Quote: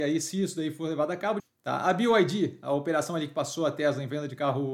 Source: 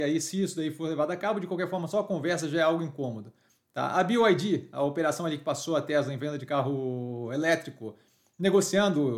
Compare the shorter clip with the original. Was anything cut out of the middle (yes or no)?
yes